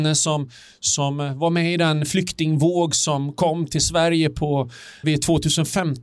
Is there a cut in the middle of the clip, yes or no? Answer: yes